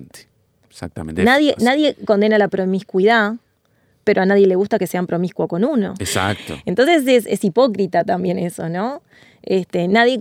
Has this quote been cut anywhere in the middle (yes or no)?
yes